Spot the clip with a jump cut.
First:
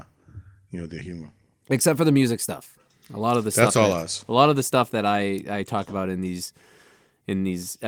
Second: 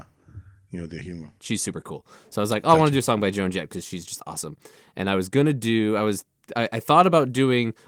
second; 1 cut; at 1.4 s

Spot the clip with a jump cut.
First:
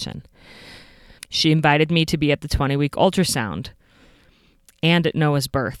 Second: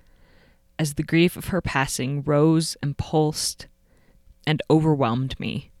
first; 1 cut; at 1.2 s

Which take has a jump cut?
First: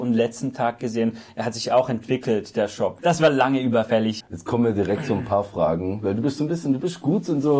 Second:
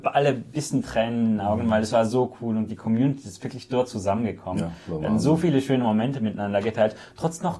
first; 2 cuts; at 3.0 s, 4.2 s

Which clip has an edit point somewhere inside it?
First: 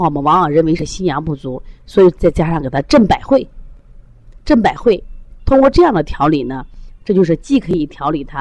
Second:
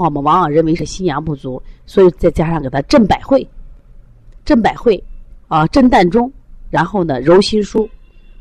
first; 1 cut; at 5.4 s

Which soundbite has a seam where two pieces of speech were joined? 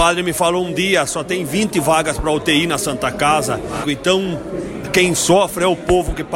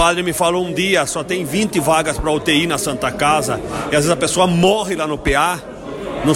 first; 1 cut; at 3.8 s

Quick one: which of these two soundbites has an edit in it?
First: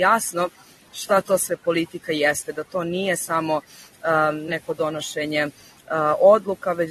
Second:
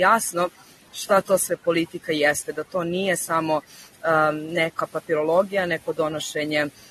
first; 1 cut; at 4.5 s

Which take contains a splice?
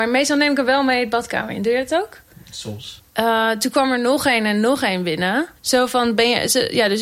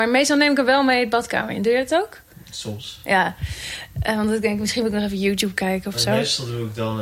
first; 2 cuts; at 3.0 s, 5.6 s

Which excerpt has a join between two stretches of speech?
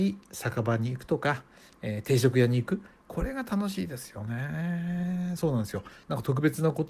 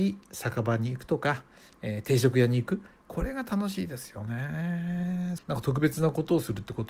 second; 1 cut; at 5.4 s

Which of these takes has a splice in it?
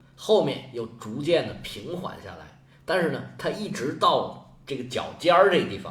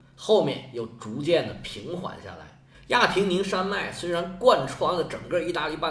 second; 1 cut; at 2.7 s

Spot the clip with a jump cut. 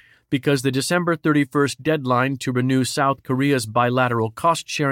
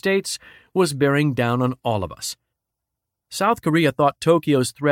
second; 1 cut; at 3.2 s

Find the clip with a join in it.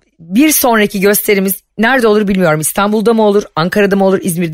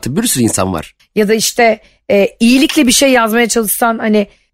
second; 1 cut; at 1.0 s

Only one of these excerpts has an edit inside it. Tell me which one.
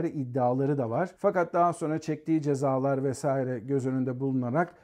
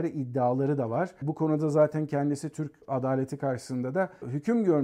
first; 1 cut; at 1.1 s

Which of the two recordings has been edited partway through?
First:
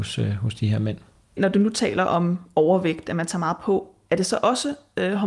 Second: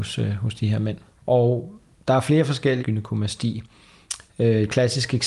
second; 3 cuts; at 1.1 s, 2.8 s, 4.3 s

